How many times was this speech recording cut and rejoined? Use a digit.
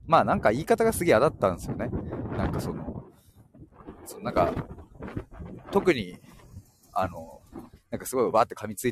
1